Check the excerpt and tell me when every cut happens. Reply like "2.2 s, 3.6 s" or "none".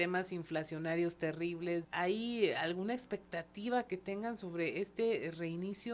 1.8 s